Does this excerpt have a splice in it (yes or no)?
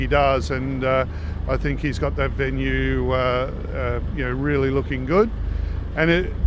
no